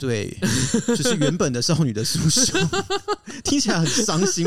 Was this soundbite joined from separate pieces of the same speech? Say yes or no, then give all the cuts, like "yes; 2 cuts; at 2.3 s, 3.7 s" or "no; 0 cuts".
no; 0 cuts